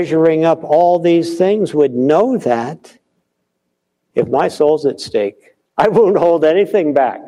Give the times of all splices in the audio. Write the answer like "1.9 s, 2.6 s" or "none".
4.1 s, 5.7 s